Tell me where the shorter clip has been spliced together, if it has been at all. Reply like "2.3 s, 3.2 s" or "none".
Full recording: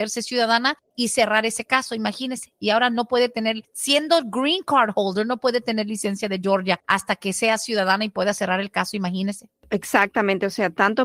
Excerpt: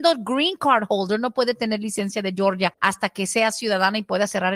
none